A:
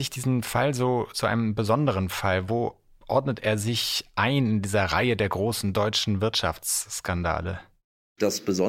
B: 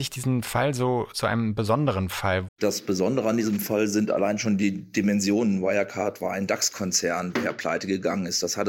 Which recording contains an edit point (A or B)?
B